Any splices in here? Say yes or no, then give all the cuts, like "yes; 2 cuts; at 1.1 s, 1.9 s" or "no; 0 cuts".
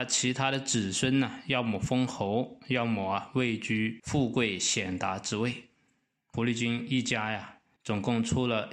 no; 0 cuts